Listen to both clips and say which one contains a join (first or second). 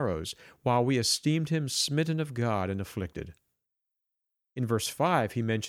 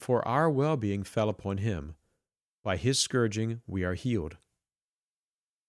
first